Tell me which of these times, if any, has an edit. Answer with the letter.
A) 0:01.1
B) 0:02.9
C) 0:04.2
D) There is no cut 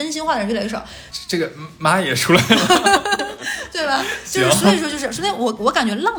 A